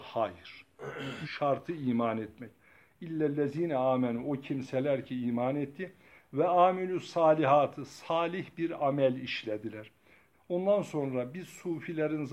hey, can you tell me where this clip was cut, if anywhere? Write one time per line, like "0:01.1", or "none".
0:01.2
0:10.3